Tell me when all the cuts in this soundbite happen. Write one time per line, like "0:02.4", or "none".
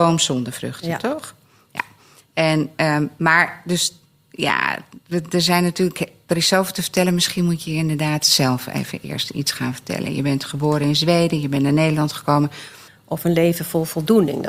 0:12.9